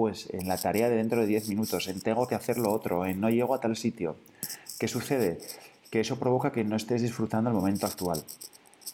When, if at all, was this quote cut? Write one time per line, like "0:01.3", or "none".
none